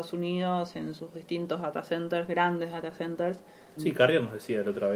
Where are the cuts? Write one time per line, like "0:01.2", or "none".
0:03.8

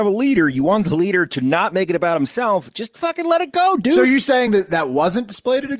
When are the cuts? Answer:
none

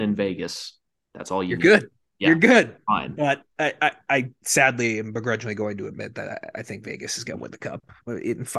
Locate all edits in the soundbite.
none

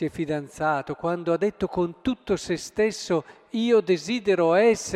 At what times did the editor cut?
none

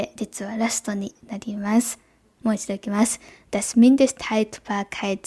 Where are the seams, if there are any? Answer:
0:02.4

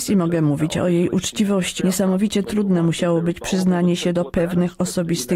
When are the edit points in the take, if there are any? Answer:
0:01.8

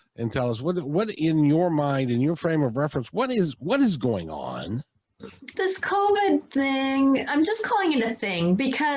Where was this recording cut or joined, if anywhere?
0:05.5
0:07.3

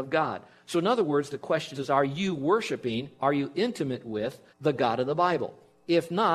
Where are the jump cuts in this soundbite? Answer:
0:01.7
0:04.5

